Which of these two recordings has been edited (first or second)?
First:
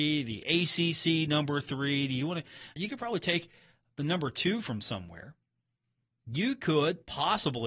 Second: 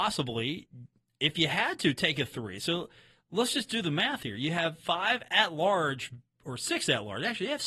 first